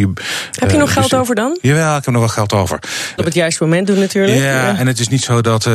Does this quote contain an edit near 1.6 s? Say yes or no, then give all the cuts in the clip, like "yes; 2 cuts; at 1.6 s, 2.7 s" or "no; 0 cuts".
no; 1 cut; at 3.2 s